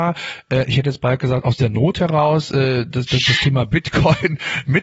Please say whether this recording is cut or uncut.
uncut